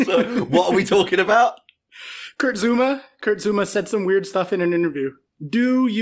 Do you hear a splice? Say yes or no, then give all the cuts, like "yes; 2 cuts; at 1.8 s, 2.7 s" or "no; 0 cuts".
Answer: no; 0 cuts